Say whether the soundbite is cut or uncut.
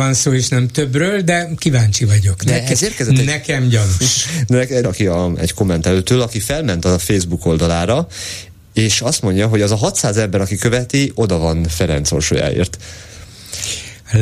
cut